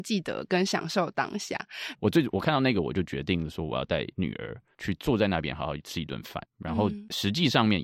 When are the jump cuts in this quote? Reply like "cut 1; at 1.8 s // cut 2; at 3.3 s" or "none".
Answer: cut 1; at 1.9 s // cut 2; at 6.5 s